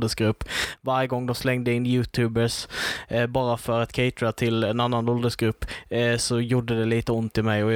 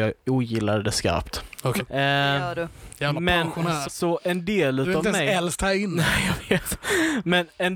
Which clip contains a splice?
second; 2 cuts; at 1.8 s, 3.8 s

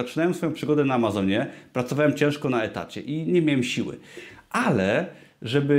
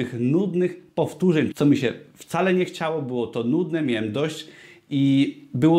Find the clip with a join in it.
second; 1 cut; at 1.5 s

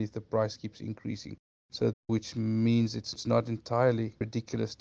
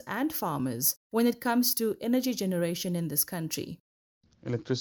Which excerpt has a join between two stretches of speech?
first; 1 cut; at 1.9 s

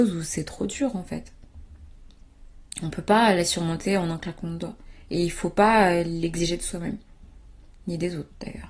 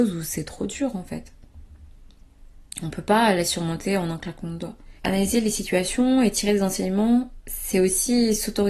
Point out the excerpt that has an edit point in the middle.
second; 1 cut; at 5.0 s

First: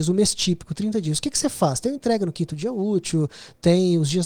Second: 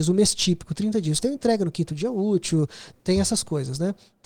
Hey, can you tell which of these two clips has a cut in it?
second; 2 cuts; at 1.2 s, 3.0 s

